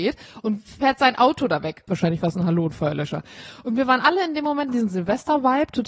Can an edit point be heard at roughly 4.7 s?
yes; 2 cuts; at 1.9 s, 4.7 s

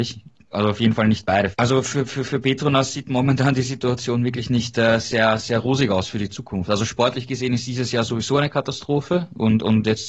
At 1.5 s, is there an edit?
yes; 1 cut; at 1.5 s

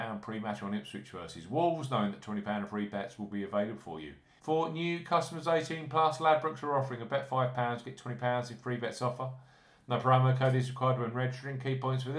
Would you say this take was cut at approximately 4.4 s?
yes; 1 cut; at 4.4 s

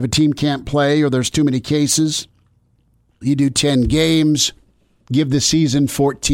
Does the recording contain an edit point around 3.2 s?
yes; 1 cut; at 3.2 s

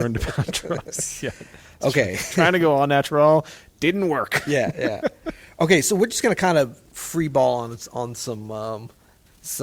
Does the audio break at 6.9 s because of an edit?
yes; 1 cut; at 6.9 s

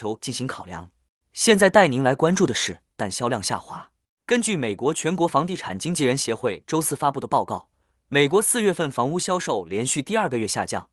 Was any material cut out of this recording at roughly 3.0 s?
yes; 1 cut; at 3.0 s

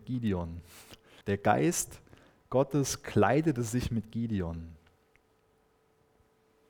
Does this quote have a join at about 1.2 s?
yes; 1 cut; at 1.2 s

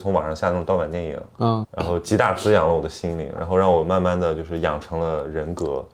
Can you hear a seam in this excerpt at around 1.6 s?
yes; 1 cut; at 1.6 s

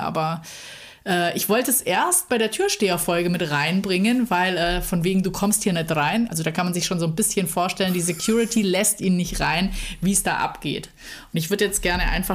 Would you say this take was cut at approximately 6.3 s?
yes; 1 cut; at 6.3 s

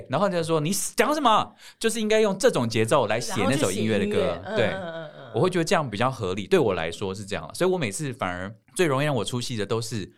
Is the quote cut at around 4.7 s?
no; 0 cuts

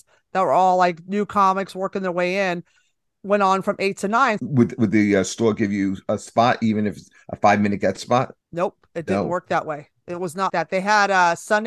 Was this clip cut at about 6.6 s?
no; 3 cuts; at 4.4 s, 8.4 s, 10.5 s

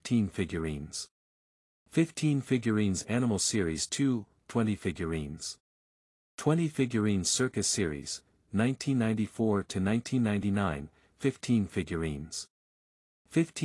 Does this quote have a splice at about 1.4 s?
no; 1 cut; at 4.4 s

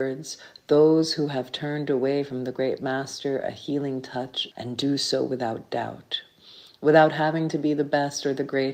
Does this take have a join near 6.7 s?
no; 1 cut; at 4.5 s

